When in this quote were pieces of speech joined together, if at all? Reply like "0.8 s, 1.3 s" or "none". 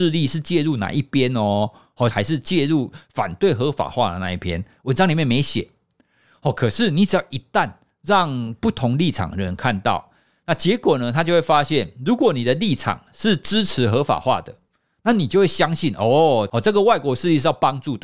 2.1 s